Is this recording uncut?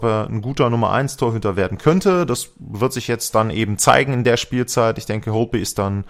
yes; 0 cuts

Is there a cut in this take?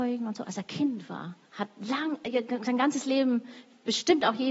yes; 1 cut; at 1.5 s

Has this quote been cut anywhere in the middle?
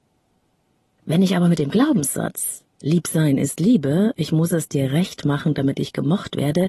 no; 0 cuts

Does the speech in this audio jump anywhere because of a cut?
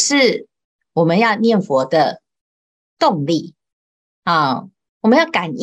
no; 0 cuts

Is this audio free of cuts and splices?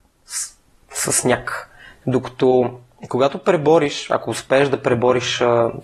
no; 1 cut; at 2.0 s

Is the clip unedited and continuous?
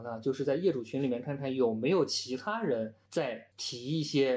yes; 0 cuts

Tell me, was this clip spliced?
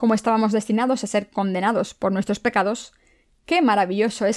no; 0 cuts

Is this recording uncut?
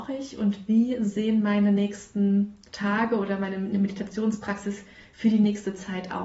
yes; 0 cuts

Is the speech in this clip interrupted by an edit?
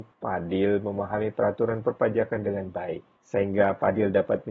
no; 0 cuts

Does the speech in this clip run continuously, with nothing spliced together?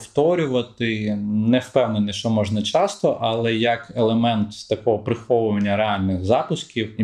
yes; 0 cuts

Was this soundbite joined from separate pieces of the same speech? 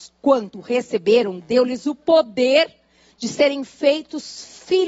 no; 0 cuts

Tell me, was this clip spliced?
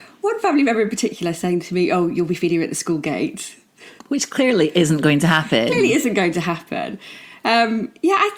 yes; 1 cut; at 4.0 s

